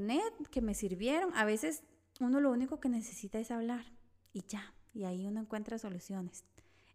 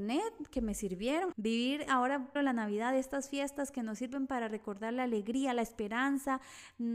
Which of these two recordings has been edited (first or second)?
second